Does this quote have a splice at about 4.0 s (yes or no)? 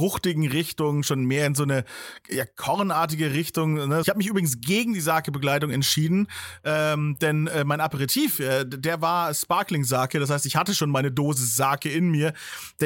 yes